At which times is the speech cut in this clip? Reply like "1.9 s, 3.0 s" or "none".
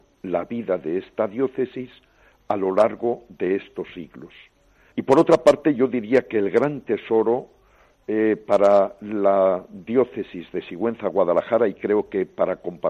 4.9 s